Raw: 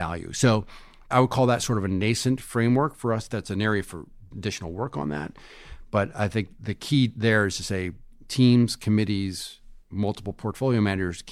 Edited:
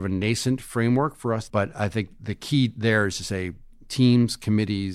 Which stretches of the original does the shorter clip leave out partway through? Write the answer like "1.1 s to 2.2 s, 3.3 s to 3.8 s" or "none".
3.3 s to 5.9 s